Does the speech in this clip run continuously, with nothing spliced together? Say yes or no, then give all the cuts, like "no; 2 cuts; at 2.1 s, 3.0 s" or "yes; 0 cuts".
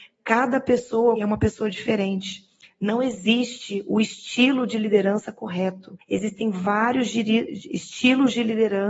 no; 1 cut; at 1.2 s